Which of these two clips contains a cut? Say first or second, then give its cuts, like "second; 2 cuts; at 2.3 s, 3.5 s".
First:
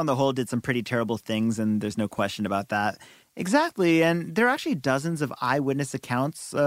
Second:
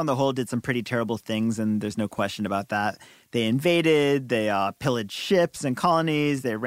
first; 1 cut; at 3.2 s